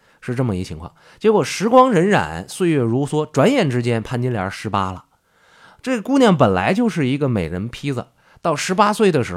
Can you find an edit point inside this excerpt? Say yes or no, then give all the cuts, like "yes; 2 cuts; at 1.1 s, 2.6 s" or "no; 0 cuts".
no; 0 cuts